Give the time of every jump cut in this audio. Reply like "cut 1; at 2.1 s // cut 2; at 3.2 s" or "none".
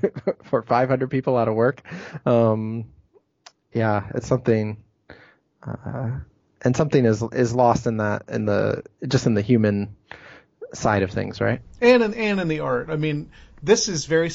none